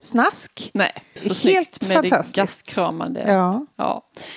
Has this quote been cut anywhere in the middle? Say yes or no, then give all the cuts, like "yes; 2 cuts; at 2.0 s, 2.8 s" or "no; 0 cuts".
yes; 1 cut; at 1.2 s